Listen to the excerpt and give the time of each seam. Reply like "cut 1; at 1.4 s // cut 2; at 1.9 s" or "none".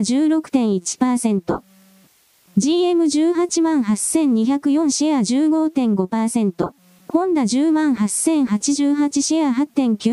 cut 1; at 7.0 s